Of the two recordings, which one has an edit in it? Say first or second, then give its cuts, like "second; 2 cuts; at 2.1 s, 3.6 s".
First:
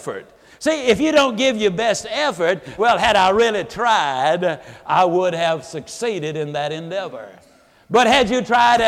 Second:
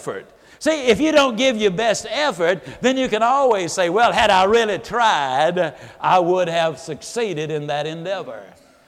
first; 1 cut; at 2.8 s